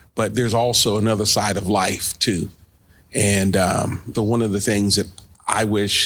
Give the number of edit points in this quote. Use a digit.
1